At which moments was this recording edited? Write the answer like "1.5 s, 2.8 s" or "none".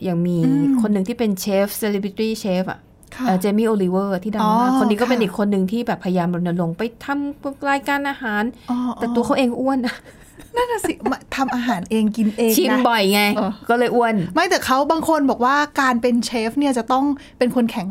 13.4 s